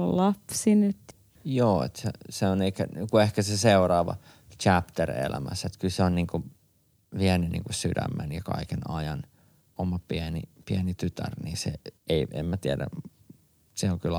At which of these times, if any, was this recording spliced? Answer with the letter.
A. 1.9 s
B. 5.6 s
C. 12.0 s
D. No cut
C